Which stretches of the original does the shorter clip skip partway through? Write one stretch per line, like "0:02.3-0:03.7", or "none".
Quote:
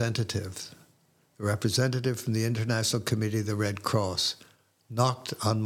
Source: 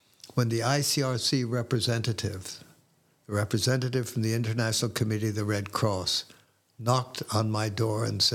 none